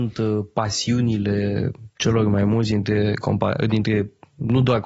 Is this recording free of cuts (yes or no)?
yes